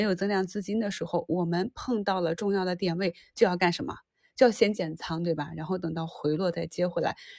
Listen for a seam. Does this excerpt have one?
no; 0 cuts

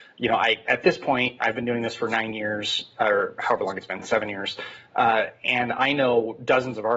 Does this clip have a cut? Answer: no; 0 cuts

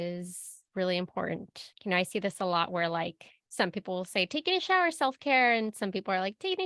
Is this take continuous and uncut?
yes; 0 cuts

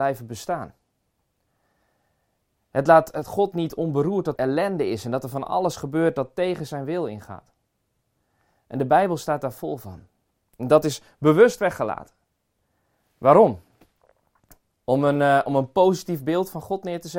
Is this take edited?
yes; 2 cuts; at 4.4 s, 10.4 s

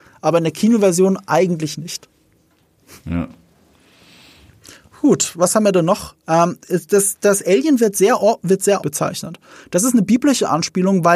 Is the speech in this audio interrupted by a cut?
yes; 2 cuts; at 6.2 s, 8.8 s

